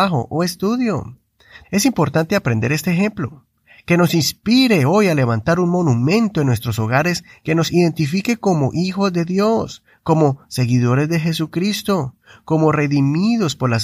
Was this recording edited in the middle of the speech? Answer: yes; 1 cut; at 1.6 s

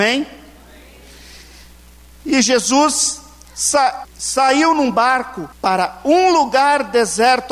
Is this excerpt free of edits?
no; 2 cuts; at 4.0 s, 5.5 s

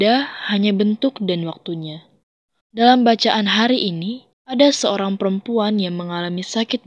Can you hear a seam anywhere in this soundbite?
yes; 2 cuts; at 2.6 s, 4.3 s

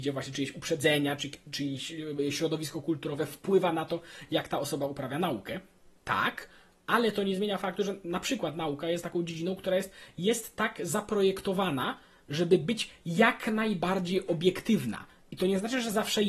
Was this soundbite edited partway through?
no; 0 cuts

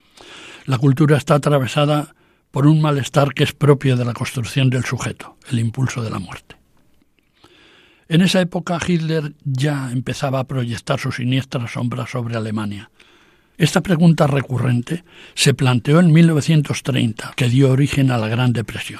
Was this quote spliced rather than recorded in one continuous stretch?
yes; 2 cuts; at 13.5 s, 17.3 s

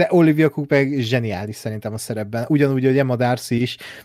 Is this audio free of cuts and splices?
yes; 0 cuts

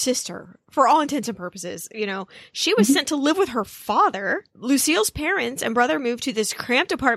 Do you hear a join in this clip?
no; 0 cuts

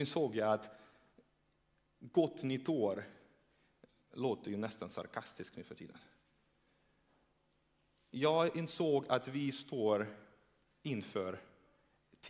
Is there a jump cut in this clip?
no; 0 cuts

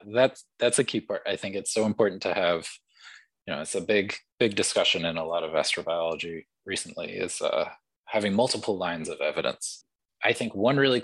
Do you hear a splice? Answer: no; 0 cuts

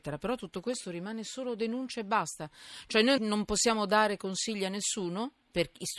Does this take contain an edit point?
yes; 1 cut; at 3.2 s

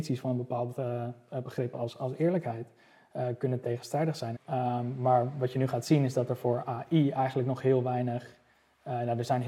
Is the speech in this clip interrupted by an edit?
yes; 1 cut; at 4.4 s

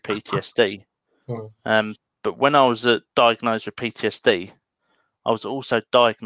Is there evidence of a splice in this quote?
no; 0 cuts

